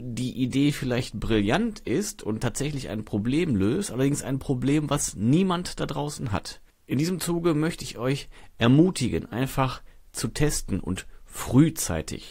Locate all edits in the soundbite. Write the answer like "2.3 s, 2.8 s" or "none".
none